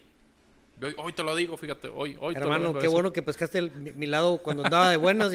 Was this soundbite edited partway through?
no; 0 cuts

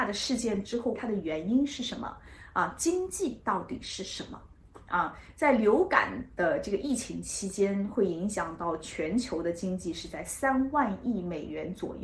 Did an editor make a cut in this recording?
yes; 1 cut; at 1.0 s

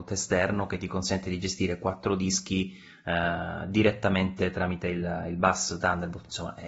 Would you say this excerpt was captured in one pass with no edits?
yes; 0 cuts

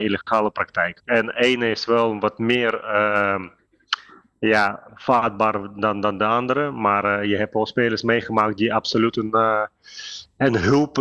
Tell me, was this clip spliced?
yes; 1 cut; at 1.0 s

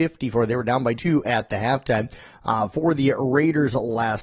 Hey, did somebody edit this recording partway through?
yes; 1 cut; at 1.0 s

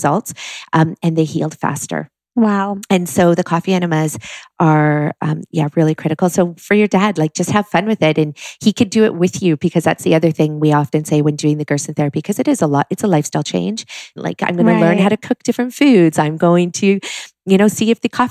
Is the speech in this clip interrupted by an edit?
yes; 1 cut; at 14.2 s

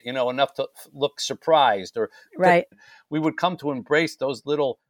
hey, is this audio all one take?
no; 2 cuts; at 1.2 s, 2.7 s

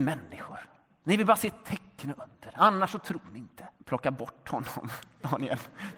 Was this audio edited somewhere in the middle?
yes; 1 cut; at 3.8 s

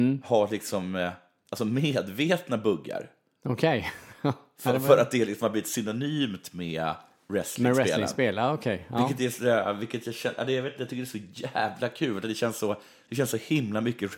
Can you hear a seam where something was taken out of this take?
no; 0 cuts

